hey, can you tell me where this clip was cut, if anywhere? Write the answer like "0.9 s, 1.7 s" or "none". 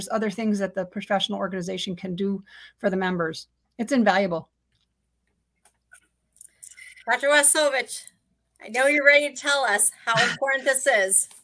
none